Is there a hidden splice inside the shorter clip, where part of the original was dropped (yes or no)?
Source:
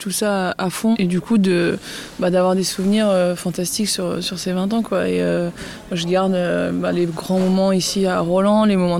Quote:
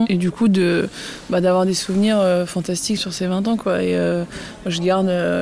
yes